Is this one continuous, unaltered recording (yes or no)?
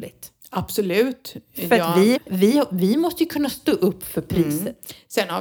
no